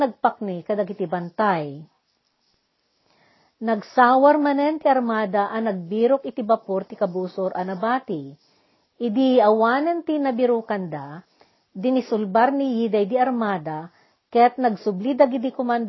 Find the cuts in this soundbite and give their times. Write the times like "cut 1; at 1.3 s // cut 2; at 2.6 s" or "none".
none